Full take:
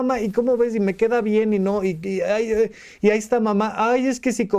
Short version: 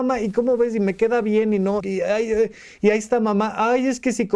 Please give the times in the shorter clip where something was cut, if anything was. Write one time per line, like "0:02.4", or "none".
0:01.8